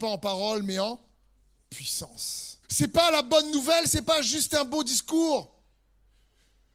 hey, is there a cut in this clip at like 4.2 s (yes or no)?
no